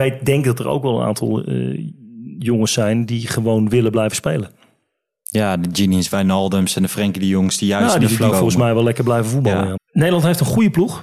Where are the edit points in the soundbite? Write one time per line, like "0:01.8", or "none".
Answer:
0:08.3
0:09.8